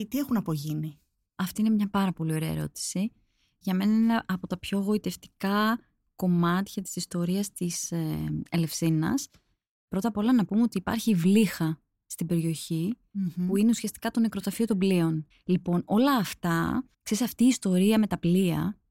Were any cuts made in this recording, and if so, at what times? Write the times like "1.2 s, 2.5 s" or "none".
15.3 s, 16.9 s